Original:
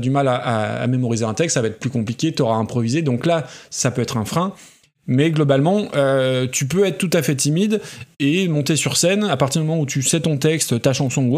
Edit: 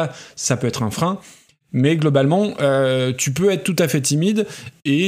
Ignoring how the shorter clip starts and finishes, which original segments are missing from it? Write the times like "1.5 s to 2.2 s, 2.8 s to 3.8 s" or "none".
none